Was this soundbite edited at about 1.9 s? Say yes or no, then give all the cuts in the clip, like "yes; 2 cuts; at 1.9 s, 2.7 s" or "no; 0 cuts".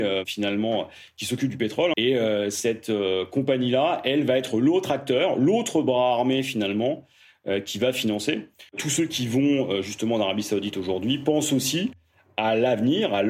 yes; 2 cuts; at 1.9 s, 8.7 s